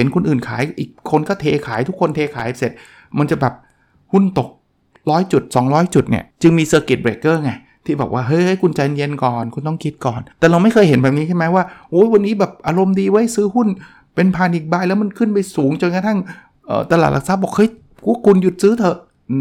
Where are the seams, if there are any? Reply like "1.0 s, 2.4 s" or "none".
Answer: 6.3 s, 10.3 s